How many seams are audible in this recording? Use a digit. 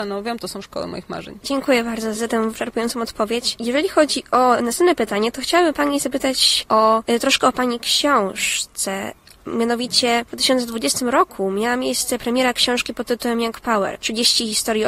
1